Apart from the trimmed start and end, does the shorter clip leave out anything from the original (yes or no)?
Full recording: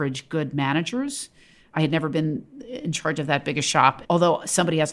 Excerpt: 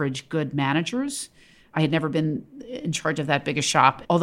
no